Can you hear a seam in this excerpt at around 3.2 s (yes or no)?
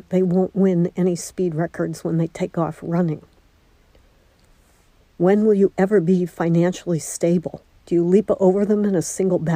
no